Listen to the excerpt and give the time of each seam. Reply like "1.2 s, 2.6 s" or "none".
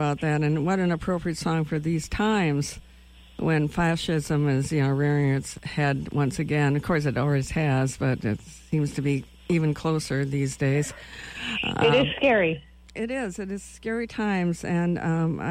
none